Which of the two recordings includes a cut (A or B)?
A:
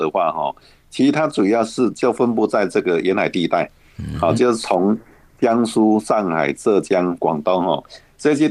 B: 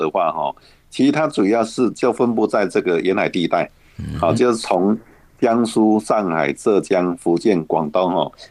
A